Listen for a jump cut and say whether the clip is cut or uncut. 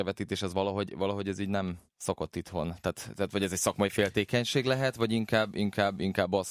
uncut